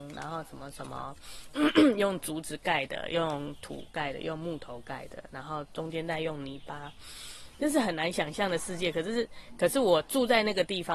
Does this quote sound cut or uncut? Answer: uncut